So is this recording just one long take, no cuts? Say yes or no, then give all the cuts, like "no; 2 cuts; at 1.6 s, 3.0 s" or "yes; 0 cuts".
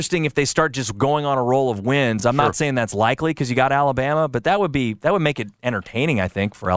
yes; 0 cuts